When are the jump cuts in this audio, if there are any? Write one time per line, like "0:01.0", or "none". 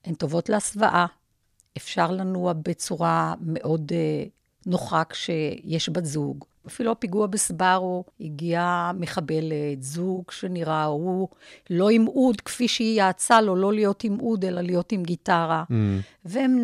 0:06.6

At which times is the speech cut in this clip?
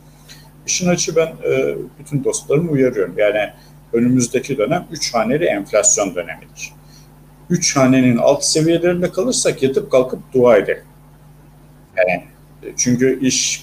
0:11.9

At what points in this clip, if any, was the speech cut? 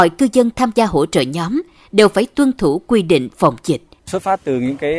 0:04.0

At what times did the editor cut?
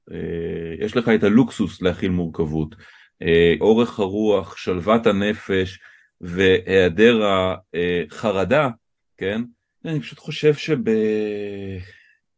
0:03.6
0:09.8

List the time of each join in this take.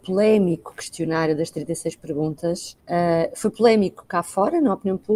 0:02.8

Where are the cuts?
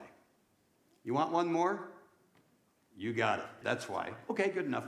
0:03.6

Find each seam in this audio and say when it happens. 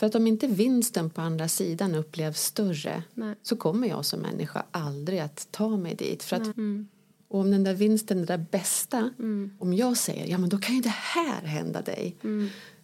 0:06.5

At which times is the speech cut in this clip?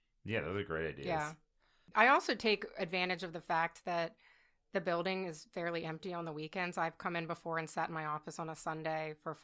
0:01.9

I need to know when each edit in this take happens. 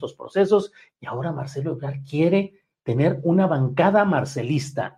0:00.9

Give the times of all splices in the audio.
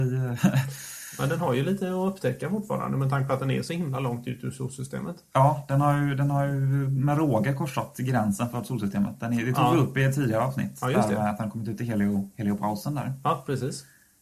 none

